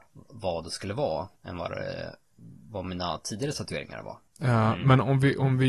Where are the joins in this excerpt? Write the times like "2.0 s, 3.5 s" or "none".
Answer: 1.4 s, 4.3 s